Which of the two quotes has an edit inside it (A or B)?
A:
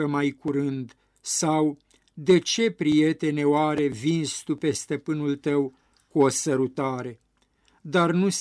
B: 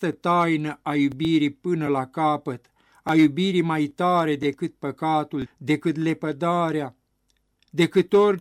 B